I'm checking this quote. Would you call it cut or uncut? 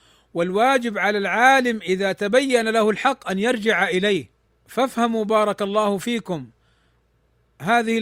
uncut